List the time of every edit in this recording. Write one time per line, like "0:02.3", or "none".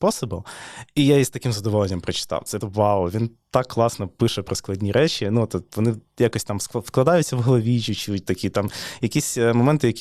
0:02.6

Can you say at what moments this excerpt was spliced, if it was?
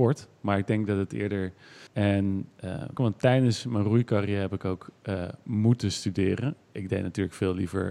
0:01.9
0:03.0

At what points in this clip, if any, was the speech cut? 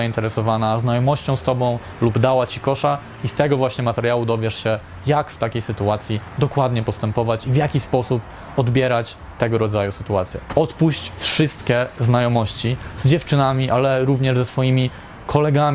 0:10.5

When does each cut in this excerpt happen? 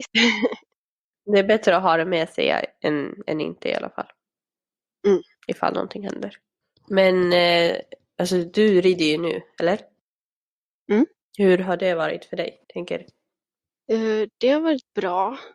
0:11.2
0:12.6

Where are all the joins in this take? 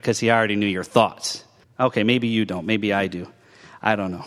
0:01.6

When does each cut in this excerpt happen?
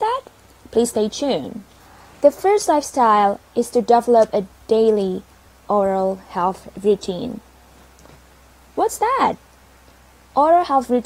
none

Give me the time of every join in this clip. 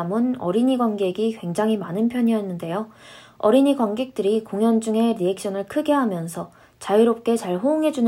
none

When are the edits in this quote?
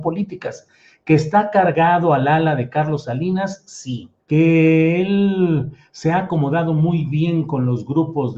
0:04.2

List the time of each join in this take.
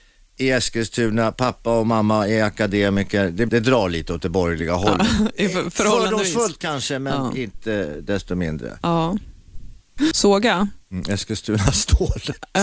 0:03.5
0:08.8
0:10.1

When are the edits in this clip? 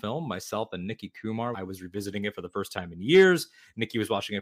0:01.5

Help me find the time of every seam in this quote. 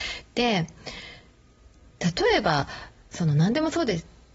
none

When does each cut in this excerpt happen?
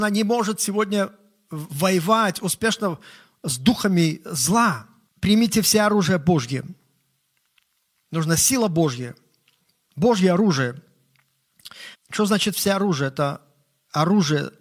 0:05.1
0:07.9
0:11.9

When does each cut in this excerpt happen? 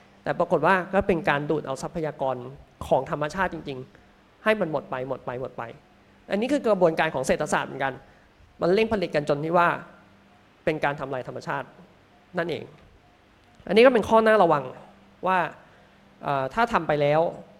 none

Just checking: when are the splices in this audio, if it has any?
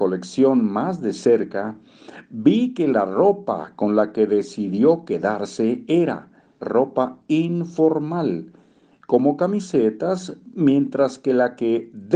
0:06.6

